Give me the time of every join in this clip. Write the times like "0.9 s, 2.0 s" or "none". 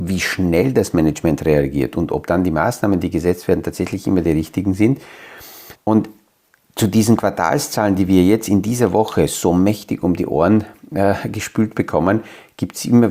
5.8 s